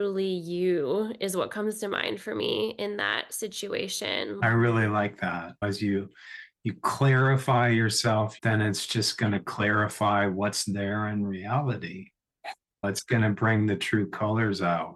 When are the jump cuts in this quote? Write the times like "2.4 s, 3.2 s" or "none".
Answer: 4.4 s, 8.4 s